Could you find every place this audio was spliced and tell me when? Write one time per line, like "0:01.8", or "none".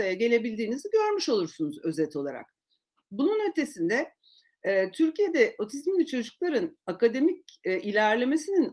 none